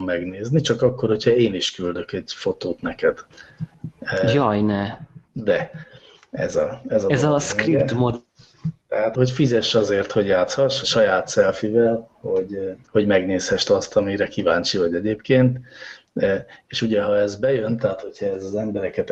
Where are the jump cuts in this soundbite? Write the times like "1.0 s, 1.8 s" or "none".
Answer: 9.1 s, 10.8 s